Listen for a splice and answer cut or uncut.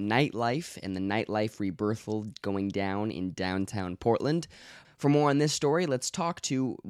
cut